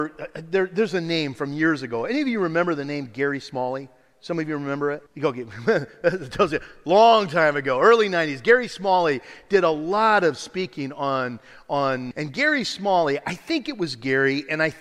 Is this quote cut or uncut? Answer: cut